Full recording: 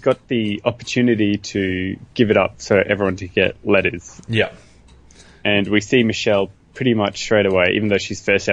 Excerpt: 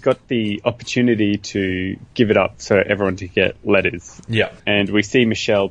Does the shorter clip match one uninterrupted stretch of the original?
no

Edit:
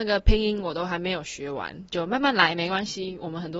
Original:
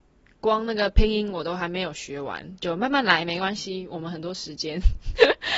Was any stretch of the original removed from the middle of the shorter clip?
no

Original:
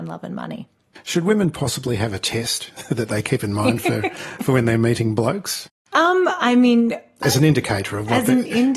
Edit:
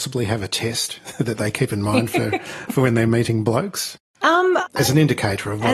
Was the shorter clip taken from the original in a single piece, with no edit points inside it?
no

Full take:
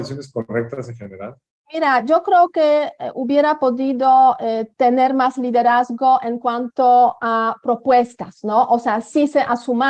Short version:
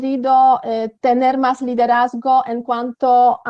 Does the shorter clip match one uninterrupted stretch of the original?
yes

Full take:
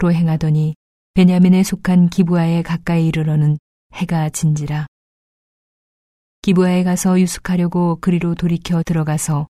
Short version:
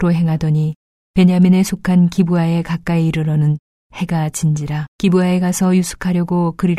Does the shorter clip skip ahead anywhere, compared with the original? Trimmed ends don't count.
yes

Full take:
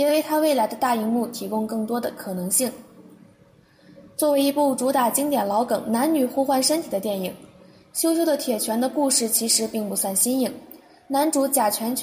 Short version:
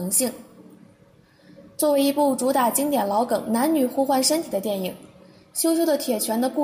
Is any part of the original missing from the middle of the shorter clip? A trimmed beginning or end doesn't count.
no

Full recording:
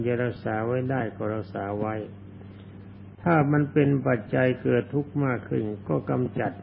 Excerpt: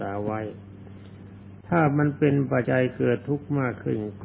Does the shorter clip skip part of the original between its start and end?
yes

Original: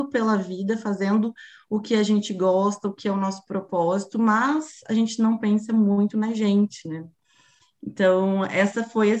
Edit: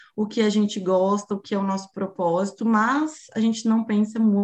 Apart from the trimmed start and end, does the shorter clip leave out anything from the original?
no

